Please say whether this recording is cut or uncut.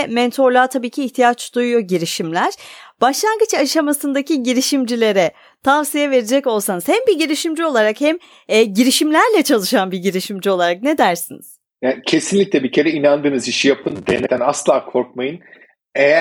uncut